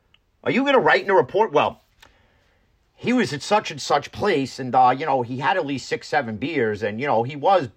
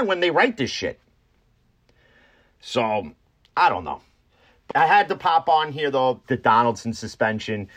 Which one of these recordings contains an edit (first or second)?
second